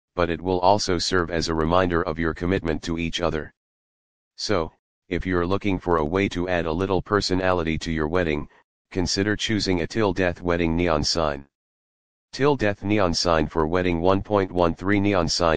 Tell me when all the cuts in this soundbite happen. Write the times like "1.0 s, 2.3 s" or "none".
none

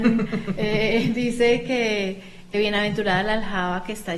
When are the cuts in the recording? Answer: none

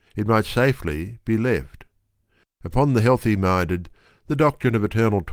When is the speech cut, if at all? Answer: 2.4 s

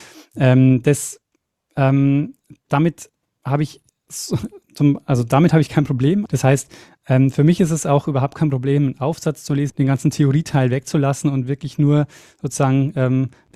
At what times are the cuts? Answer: 4.6 s, 6.3 s, 9.7 s

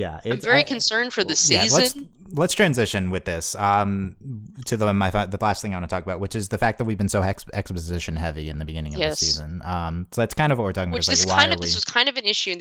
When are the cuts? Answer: none

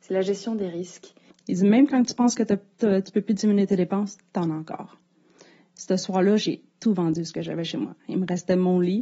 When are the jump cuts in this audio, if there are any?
1.3 s

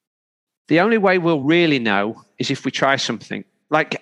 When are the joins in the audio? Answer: none

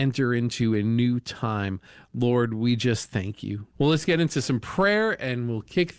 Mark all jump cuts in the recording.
3.7 s

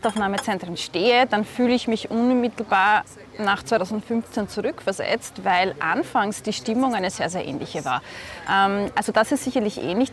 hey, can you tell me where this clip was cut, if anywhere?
8.5 s

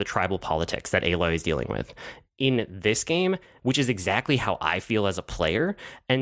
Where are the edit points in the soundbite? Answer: 3.6 s

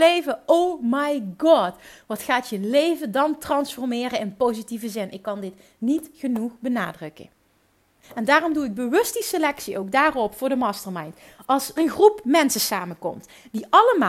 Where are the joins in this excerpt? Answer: 8.0 s, 11.8 s

